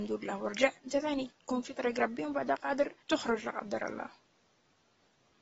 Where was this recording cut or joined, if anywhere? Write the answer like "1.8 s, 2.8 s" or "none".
3.0 s